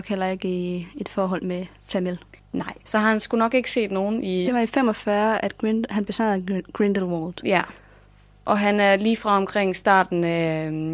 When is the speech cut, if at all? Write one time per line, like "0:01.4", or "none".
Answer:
0:04.4